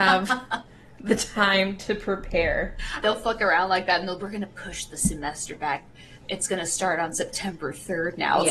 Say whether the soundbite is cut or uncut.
cut